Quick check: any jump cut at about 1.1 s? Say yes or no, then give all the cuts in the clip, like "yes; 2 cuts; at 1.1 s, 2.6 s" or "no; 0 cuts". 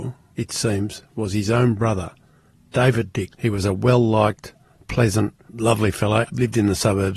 no; 2 cuts; at 3.3 s, 6.3 s